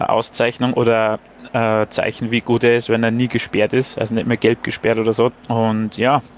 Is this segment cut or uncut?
cut